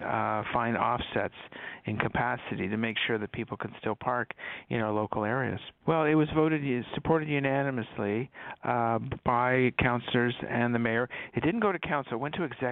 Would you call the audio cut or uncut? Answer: cut